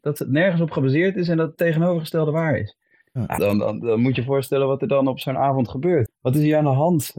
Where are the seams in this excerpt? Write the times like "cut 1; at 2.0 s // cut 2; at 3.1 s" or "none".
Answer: cut 1; at 3.4 s // cut 2; at 6.1 s